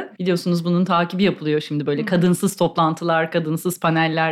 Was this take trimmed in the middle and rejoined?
no; 0 cuts

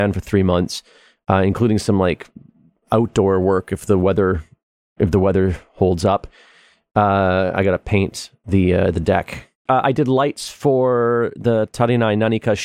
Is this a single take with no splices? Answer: no; 1 cut; at 9.7 s

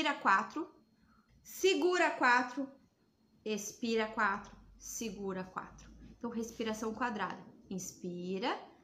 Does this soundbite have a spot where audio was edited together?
yes; 1 cut; at 1.3 s

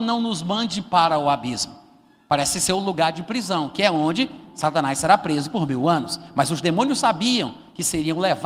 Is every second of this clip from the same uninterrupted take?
yes; 0 cuts

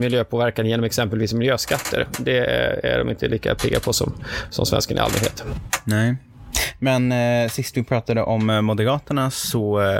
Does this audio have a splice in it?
no; 0 cuts

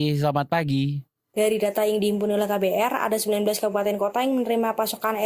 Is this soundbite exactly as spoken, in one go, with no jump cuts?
no; 1 cut; at 1.3 s

